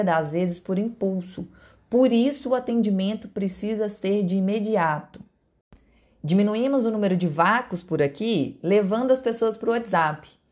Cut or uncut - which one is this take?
uncut